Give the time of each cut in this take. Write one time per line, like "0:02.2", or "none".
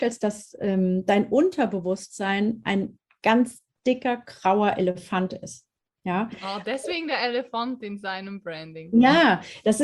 none